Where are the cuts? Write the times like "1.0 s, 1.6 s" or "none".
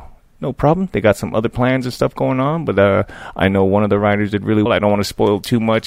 4.7 s